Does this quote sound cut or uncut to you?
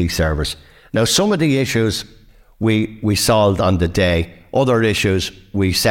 uncut